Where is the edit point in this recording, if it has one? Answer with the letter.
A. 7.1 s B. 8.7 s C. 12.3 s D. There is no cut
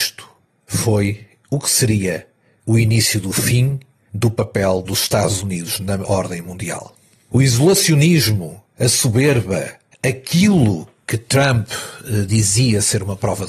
D